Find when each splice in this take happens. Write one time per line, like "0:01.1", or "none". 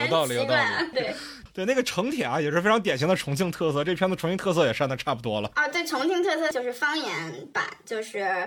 0:00.9
0:06.5

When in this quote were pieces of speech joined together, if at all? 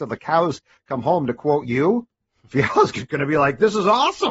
none

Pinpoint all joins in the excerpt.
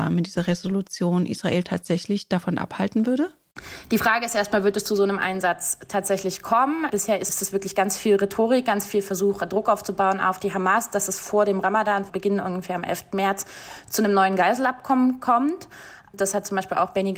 none

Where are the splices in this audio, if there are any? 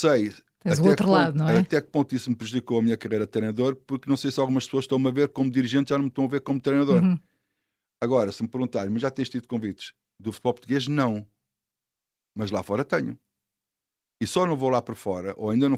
none

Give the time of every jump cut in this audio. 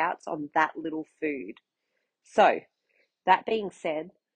none

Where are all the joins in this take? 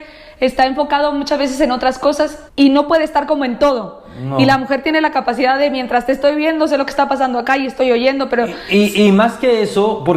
0:02.5

